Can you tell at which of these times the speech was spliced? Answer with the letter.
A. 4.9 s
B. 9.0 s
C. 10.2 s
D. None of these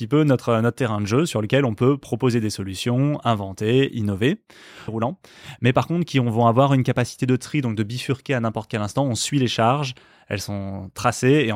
A